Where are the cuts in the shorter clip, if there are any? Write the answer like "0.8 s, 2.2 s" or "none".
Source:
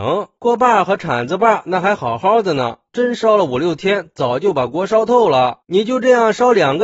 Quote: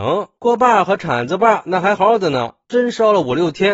2.0 s

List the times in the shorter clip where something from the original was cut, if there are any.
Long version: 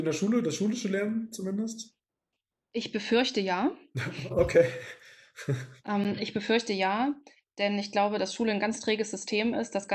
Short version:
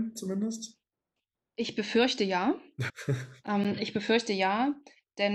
2.9 s

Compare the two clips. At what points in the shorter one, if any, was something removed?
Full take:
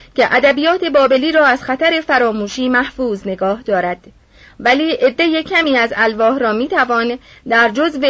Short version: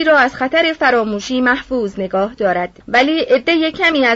2.8 s

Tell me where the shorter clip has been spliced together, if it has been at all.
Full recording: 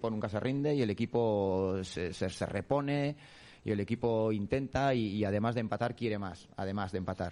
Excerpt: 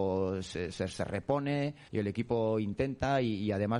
1.9 s

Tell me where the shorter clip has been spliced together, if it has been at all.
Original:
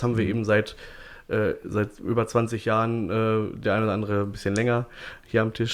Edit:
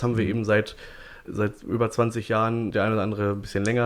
1.2 s, 2.7 s

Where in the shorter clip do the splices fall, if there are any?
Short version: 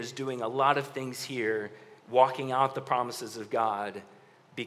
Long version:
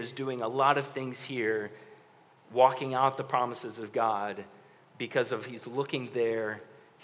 2.0 s

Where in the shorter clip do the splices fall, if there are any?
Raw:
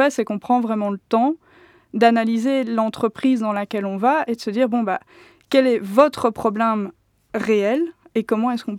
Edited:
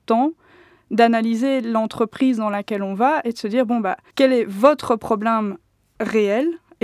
4.1 s

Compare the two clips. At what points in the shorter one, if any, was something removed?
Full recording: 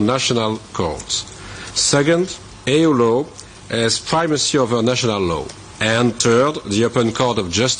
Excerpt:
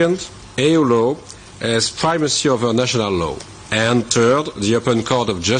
none

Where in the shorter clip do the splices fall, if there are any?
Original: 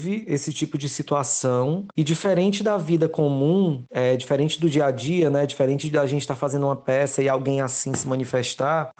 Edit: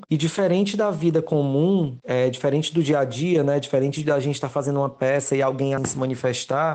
5.8 s

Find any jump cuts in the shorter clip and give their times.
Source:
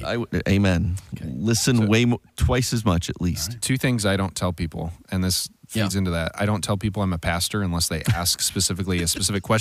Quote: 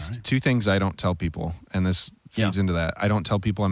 none

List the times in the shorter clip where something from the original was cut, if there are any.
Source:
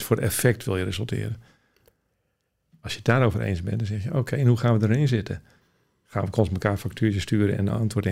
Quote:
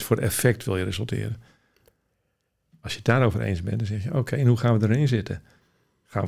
none

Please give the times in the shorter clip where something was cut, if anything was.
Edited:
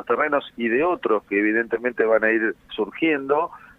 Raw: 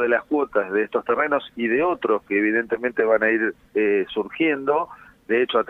2.7 s

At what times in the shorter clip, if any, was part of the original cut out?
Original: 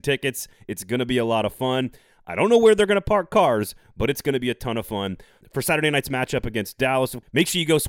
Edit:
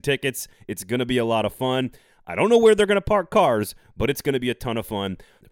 none

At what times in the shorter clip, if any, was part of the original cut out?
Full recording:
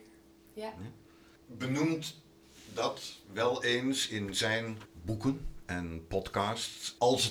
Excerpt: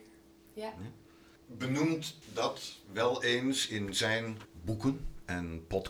2.2 s

